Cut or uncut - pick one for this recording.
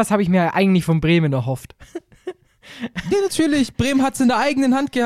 uncut